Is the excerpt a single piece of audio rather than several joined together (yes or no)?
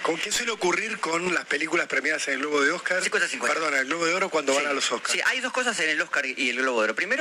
yes